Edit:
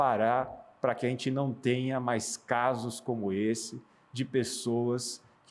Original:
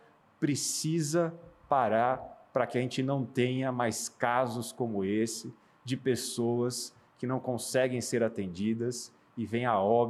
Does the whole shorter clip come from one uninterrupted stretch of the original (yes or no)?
yes